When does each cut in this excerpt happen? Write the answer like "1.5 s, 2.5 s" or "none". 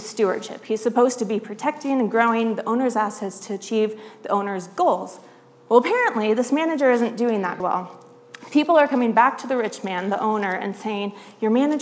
7.6 s